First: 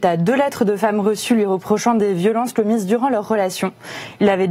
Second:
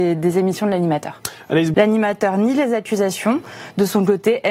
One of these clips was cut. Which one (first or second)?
second